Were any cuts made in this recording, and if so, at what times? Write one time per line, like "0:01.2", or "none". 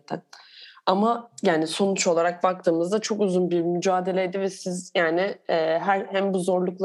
none